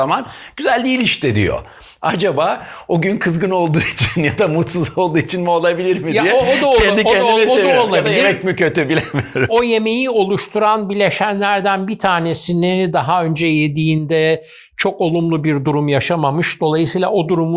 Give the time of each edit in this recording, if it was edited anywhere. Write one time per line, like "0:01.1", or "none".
0:09.5